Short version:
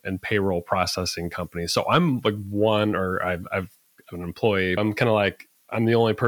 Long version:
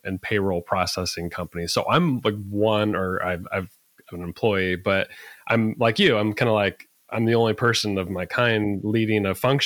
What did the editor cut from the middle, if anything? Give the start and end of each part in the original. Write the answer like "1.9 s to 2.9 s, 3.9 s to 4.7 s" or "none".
4.8 s to 6.2 s